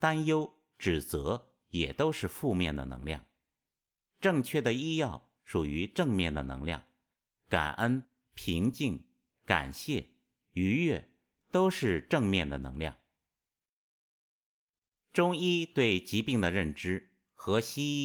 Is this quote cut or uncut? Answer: uncut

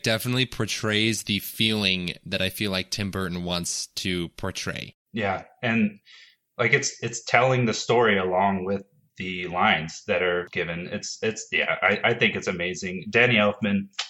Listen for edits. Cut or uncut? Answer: uncut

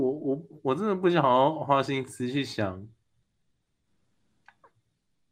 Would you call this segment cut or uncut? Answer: uncut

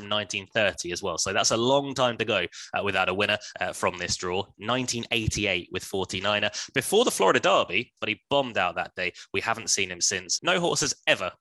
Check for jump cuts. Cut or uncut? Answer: cut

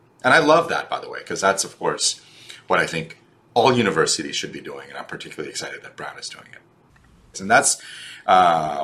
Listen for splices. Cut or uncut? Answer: cut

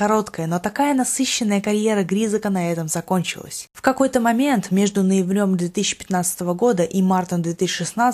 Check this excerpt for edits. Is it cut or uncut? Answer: cut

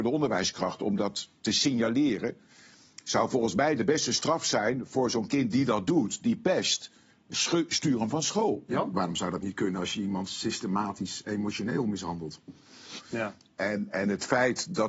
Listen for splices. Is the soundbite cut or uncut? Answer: cut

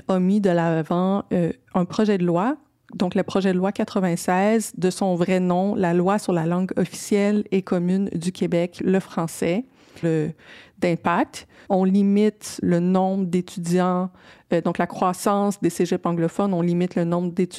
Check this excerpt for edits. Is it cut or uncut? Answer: cut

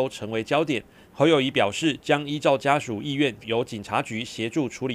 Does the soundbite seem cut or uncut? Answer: cut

